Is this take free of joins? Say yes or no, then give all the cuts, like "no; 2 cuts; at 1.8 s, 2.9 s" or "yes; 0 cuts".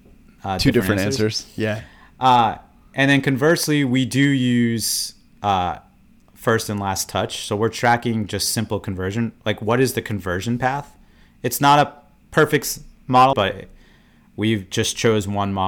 no; 1 cut; at 13.3 s